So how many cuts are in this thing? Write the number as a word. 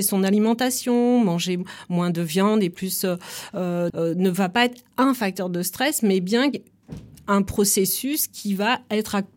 one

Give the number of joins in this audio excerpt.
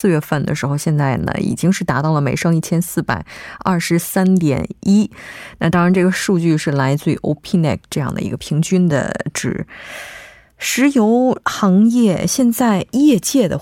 zero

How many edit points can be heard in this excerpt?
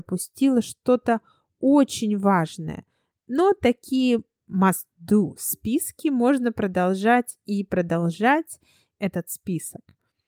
one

